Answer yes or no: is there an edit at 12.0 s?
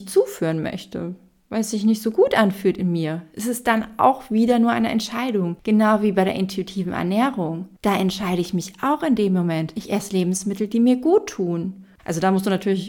yes